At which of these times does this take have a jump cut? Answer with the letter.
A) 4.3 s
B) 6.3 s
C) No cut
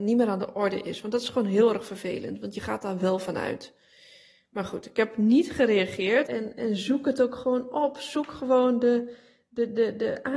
B